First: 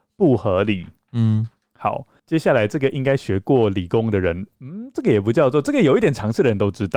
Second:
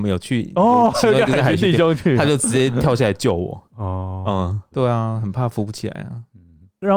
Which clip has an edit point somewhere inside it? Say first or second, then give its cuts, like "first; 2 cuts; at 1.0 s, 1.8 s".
second; 1 cut; at 4.7 s